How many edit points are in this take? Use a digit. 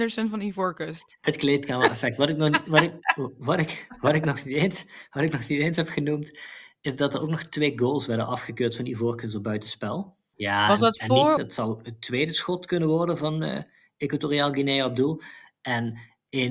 2